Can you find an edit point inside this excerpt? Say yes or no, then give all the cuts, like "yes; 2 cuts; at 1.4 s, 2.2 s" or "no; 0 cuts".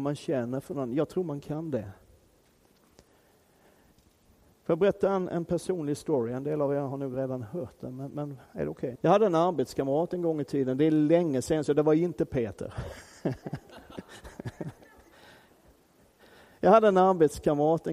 yes; 1 cut; at 9.0 s